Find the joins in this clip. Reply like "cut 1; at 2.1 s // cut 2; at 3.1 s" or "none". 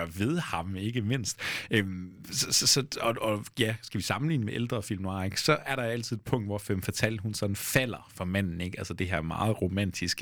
none